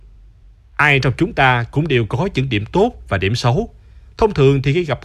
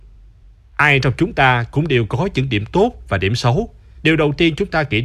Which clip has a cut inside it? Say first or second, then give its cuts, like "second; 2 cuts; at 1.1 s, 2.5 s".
second; 1 cut; at 4.0 s